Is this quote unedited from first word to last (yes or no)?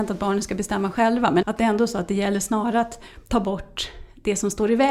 no